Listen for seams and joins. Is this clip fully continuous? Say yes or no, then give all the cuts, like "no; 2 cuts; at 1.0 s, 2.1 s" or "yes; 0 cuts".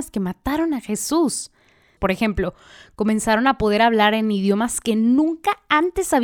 no; 1 cut; at 2.0 s